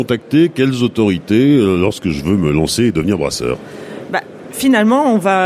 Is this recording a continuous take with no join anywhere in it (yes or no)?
yes